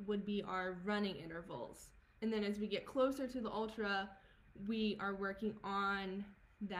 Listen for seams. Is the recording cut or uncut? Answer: cut